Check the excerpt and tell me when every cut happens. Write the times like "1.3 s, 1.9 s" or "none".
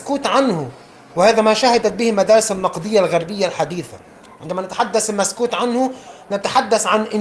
none